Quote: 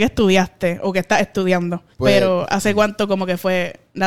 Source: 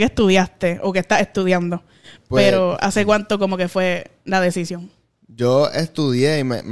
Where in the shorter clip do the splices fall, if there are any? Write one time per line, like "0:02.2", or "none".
0:01.9